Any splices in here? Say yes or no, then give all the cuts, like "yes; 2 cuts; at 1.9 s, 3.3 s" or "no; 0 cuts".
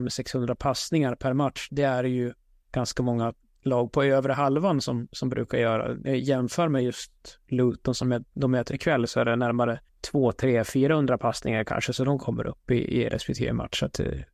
yes; 2 cuts; at 1.7 s, 9.9 s